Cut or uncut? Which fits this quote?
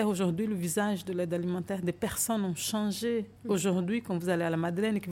cut